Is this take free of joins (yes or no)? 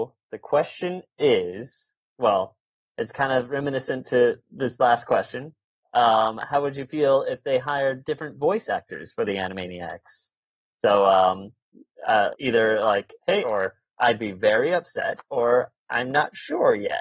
no